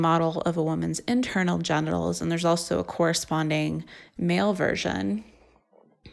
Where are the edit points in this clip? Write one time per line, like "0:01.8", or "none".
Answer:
none